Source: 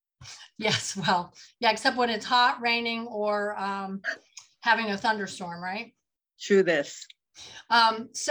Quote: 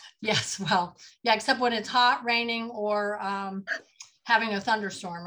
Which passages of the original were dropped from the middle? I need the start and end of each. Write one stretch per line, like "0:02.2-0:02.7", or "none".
none

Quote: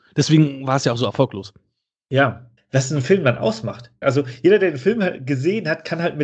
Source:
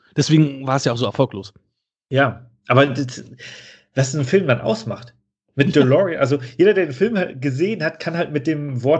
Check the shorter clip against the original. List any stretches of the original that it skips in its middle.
0:02.6-0:03.8
0:05.2-0:06.2

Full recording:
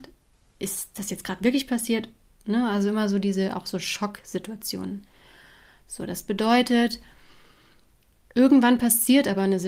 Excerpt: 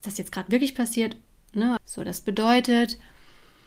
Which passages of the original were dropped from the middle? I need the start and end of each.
0:02.7-0:05.8

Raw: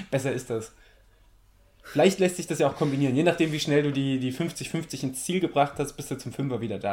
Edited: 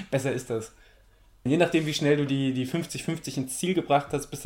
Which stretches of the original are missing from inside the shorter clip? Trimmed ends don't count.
0:01.5-0:03.1

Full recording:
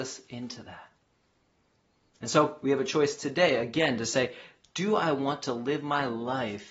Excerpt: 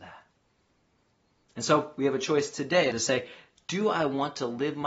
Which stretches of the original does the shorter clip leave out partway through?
0:03.6-0:04.0

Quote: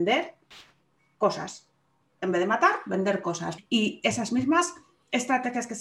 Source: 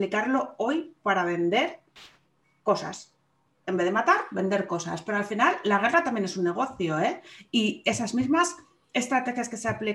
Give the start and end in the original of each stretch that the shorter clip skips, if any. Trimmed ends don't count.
0:05.0-0:07.4

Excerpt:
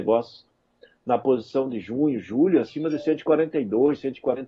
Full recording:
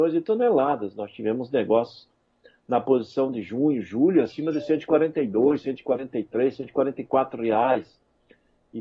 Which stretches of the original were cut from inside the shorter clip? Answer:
none

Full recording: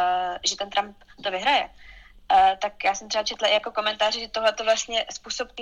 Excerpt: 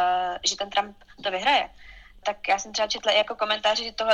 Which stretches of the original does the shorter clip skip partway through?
0:02.2-0:02.6

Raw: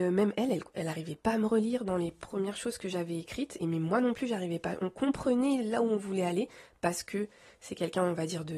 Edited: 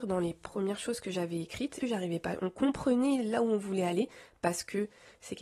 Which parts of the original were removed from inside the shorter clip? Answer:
0:03.6-0:04.2

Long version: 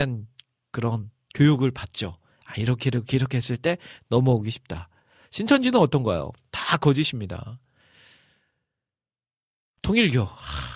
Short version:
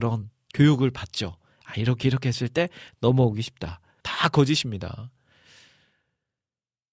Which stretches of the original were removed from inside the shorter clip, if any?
0:02.8-0:03.1
0:05.1-0:06.5

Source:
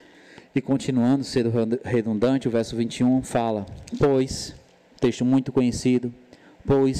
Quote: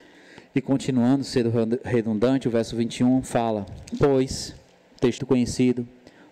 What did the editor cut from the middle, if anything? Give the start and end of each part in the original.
0:05.2-0:05.4

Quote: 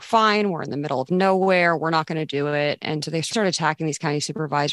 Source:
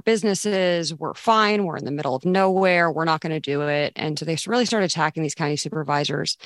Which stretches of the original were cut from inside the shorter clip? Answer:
0:04.5-0:04.7

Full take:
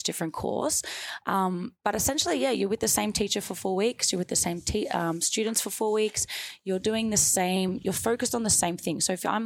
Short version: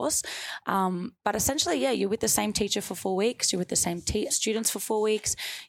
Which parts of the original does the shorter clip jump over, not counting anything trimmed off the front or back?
0:04.9-0:05.2

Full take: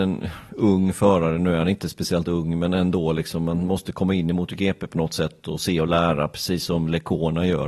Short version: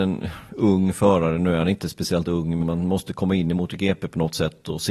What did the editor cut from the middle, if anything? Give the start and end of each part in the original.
0:02.6-0:03.4

